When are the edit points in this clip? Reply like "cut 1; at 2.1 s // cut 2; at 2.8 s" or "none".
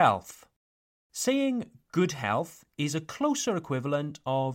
cut 1; at 1.0 s